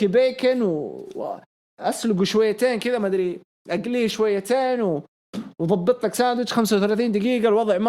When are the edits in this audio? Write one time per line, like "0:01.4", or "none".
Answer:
none